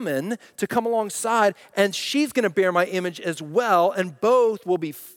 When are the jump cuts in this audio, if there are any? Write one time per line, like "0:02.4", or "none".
none